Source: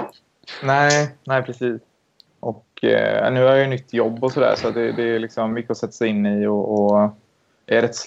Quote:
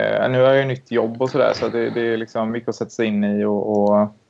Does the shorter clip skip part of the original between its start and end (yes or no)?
no